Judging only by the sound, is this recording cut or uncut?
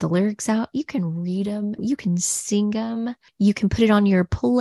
cut